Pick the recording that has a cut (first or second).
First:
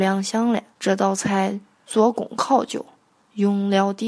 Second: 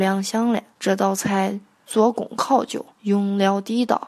second